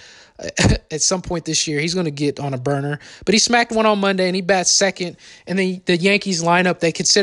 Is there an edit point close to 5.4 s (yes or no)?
no